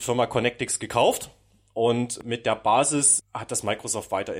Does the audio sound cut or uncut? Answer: cut